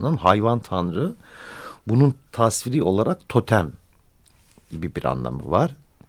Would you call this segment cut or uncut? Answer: uncut